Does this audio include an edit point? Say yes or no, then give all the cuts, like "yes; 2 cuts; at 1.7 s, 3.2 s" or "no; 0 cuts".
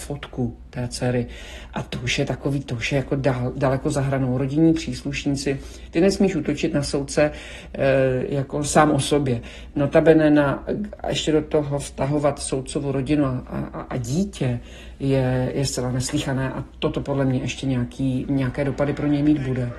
no; 0 cuts